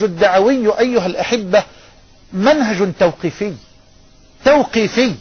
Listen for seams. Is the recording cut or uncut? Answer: uncut